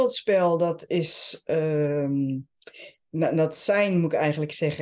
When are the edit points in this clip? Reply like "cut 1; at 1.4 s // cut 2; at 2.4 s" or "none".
none